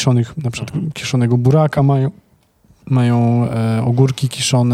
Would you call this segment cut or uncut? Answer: uncut